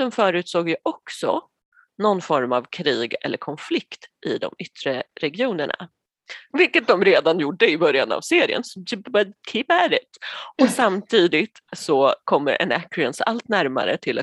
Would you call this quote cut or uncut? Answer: cut